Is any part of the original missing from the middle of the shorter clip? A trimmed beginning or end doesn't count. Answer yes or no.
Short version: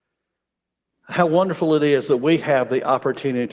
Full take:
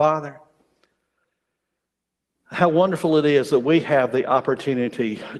no